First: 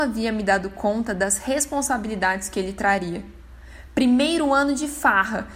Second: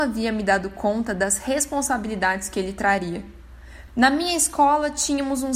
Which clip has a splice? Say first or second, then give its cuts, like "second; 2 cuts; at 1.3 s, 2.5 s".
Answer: second; 1 cut; at 3.9 s